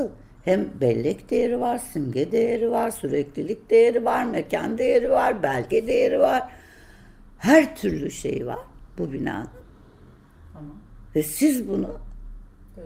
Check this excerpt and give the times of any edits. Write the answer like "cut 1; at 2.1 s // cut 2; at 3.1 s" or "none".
none